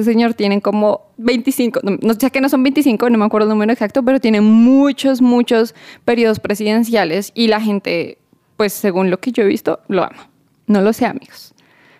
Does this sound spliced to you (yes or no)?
no